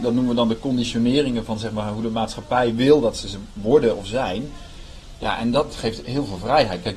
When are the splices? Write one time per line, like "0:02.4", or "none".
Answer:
none

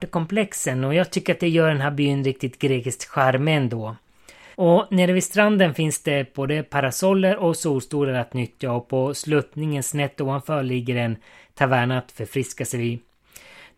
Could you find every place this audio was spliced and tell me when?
0:04.5

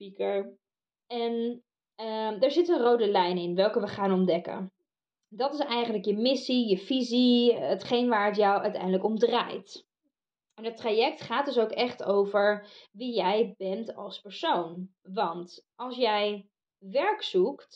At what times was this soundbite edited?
0:15.0

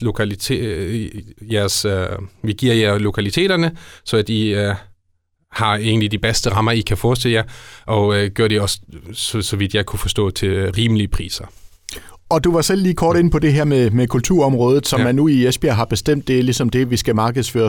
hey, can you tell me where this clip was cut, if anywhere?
none

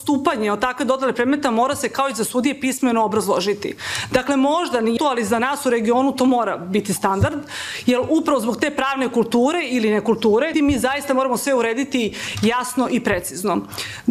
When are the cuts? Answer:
0:05.0
0:10.5

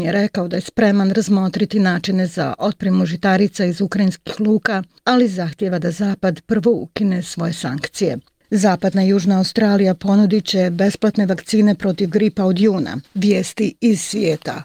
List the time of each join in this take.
0:08.4
0:13.0

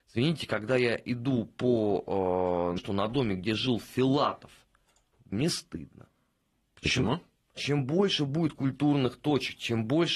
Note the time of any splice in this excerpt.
0:02.8
0:05.3
0:07.6

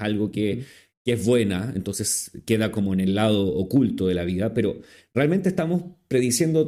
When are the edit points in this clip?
none

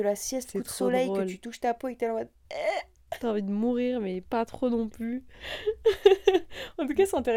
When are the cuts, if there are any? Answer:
none

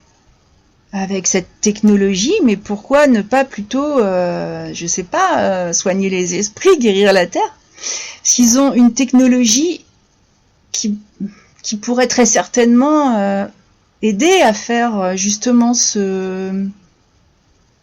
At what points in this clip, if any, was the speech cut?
none

